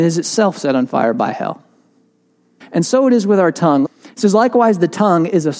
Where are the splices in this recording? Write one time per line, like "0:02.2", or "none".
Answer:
0:02.6
0:03.8